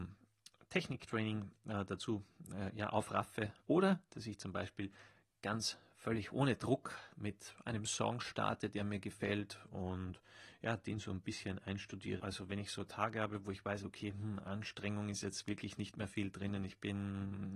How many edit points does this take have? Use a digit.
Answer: 2